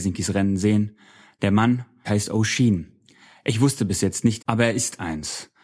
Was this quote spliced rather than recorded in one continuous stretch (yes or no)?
yes